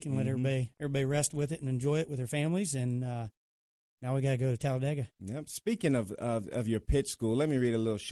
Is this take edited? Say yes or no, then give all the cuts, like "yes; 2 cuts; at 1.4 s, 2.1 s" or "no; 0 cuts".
no; 0 cuts